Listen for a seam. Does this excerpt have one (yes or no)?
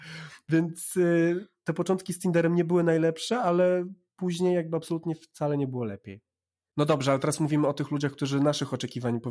no